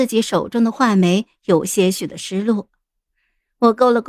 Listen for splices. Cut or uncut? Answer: uncut